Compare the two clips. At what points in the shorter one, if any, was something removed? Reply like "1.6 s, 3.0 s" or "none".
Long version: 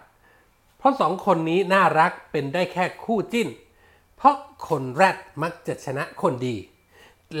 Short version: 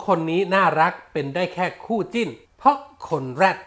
2.5 s